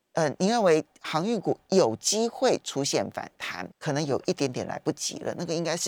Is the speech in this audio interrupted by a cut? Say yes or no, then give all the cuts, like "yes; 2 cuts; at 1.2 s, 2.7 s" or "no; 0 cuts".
yes; 1 cut; at 3.7 s